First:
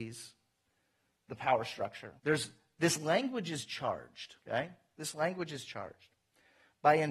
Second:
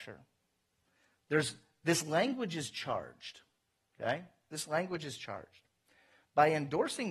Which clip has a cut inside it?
first; 2 cuts; at 2.2 s, 4.4 s

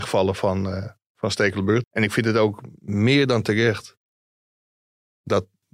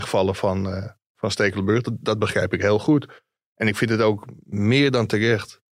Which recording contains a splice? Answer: first; 1 cut; at 1.8 s

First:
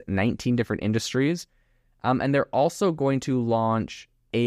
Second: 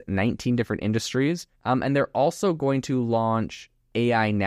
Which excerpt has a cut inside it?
second; 1 cut; at 1.5 s

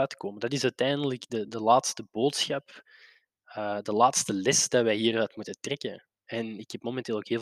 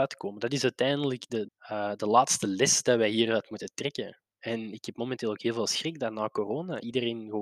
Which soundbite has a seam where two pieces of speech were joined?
second; 1 cut; at 1.5 s

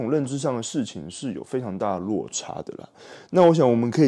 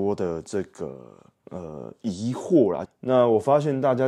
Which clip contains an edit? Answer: second; 1 cut; at 2.9 s

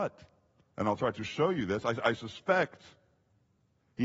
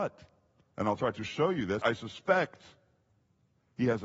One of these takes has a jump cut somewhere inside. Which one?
second; 1 cut; at 1.8 s

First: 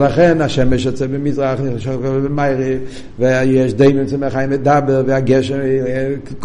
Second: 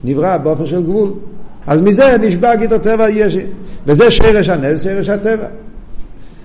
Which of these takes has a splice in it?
second; 1 cut; at 1.6 s

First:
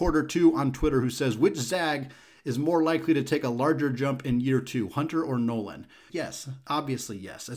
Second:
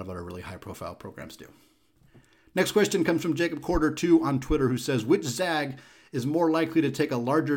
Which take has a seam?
first; 1 cut; at 6.1 s

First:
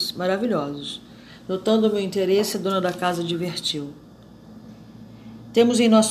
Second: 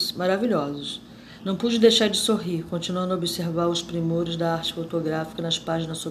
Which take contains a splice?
second; 1 cut; at 1.4 s

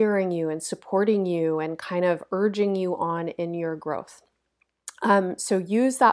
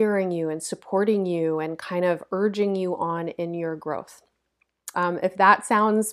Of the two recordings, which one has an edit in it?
second; 1 cut; at 4.9 s

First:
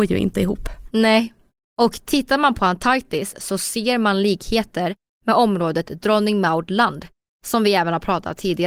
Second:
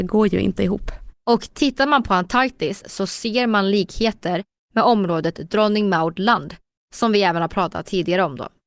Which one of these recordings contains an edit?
second; 1 cut; at 1.1 s

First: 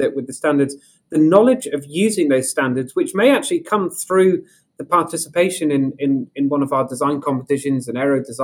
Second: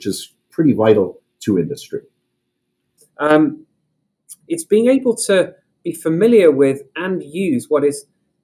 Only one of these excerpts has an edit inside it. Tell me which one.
second; 2 cuts; at 3.0 s, 4.5 s

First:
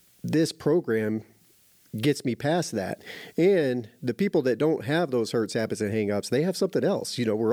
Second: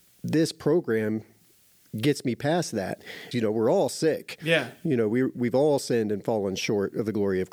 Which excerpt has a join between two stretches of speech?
second; 1 cut; at 3.3 s

